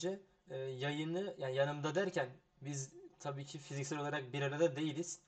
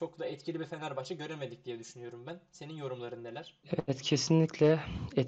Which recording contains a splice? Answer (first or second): second